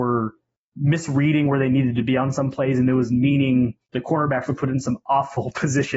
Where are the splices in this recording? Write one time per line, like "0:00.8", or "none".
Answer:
0:03.8